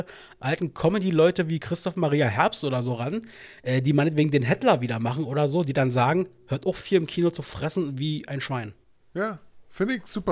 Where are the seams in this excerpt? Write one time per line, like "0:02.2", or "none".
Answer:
none